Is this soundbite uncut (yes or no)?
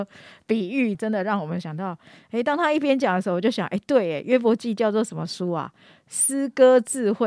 no